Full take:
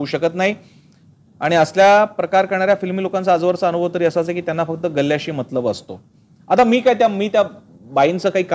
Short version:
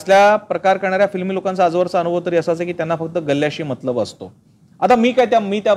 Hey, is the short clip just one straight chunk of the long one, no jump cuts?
yes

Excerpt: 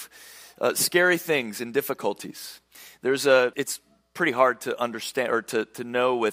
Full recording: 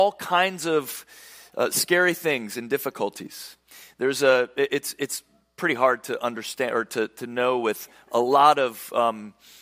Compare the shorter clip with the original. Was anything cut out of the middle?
yes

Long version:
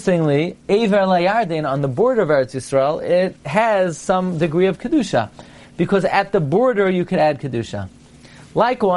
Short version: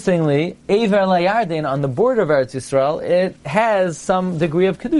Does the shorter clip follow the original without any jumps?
yes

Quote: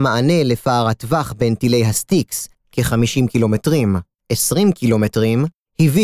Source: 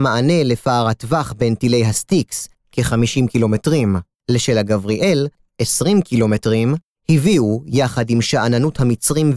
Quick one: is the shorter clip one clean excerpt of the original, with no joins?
no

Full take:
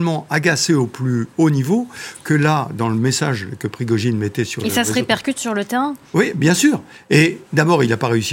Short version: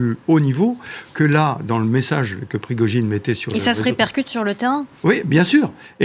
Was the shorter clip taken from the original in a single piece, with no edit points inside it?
yes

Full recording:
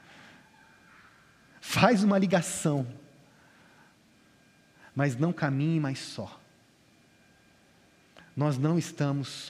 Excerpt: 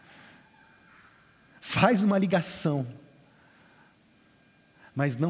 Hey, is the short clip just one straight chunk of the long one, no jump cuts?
yes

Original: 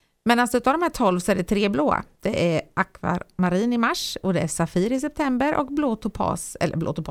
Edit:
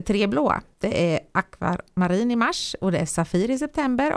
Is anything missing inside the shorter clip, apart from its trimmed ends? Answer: no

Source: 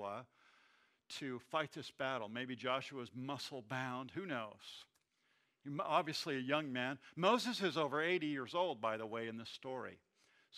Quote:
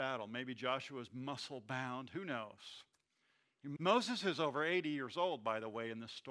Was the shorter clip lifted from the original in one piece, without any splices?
no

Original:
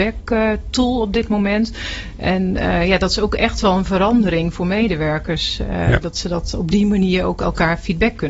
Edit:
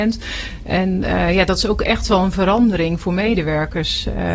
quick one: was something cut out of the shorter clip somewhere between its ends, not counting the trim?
no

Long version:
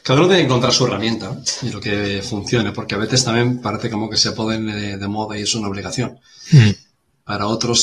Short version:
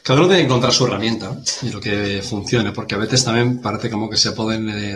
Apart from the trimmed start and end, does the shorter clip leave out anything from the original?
no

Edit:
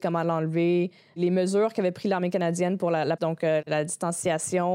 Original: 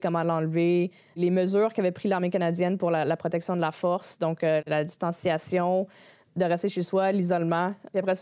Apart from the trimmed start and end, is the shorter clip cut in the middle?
yes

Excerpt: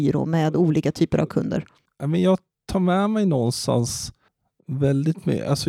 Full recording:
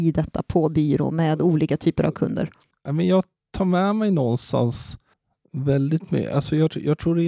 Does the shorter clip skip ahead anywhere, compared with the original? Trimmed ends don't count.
no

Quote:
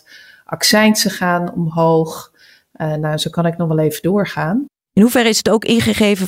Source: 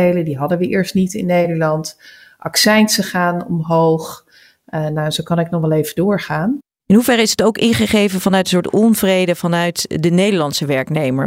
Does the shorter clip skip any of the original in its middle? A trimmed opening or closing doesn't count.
no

